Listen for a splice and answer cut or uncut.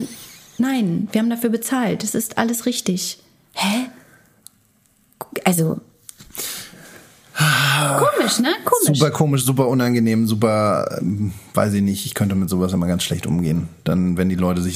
uncut